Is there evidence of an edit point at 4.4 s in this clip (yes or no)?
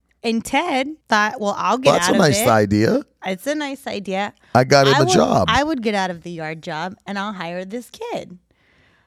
no